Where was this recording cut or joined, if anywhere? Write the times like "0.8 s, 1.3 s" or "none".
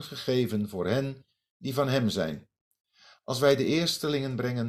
none